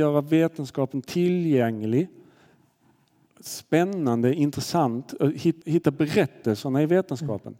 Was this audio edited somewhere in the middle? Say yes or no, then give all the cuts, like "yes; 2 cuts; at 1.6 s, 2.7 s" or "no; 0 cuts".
yes; 1 cut; at 5.6 s